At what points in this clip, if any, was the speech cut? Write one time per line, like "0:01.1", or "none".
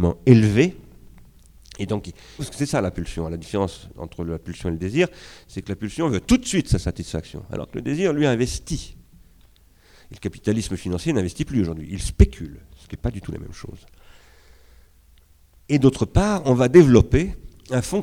0:02.4